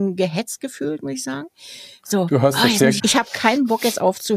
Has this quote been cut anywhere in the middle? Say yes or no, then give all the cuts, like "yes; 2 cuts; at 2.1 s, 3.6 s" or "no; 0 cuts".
yes; 1 cut; at 3.0 s